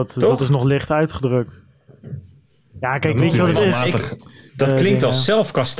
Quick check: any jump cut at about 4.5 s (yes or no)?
yes